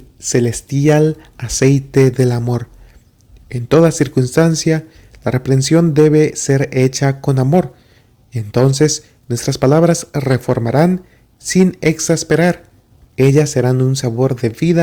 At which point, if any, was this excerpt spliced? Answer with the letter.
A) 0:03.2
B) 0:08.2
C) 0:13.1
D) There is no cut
C